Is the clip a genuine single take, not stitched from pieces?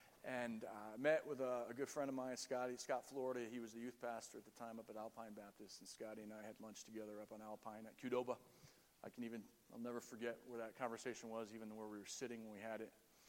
yes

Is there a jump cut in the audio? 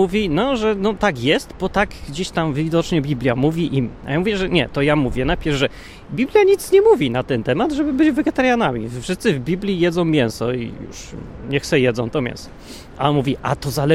no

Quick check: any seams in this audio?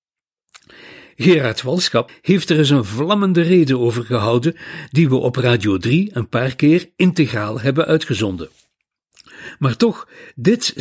yes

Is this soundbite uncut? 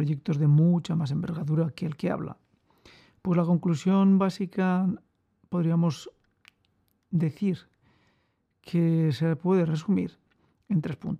yes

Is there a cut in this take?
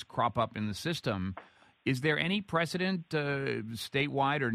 no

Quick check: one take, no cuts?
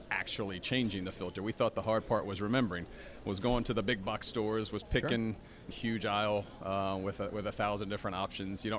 no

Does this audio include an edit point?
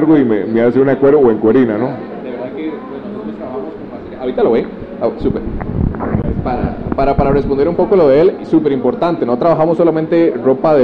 no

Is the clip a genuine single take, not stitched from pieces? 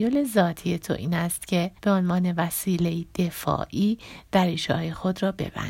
no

